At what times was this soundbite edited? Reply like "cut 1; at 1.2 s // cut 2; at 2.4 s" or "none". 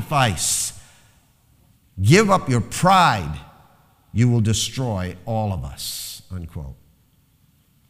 cut 1; at 1.8 s